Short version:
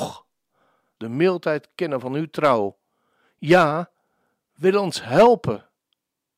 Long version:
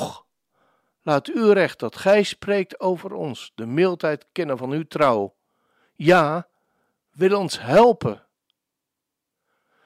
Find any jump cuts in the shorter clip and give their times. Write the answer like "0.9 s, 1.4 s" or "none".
1.0 s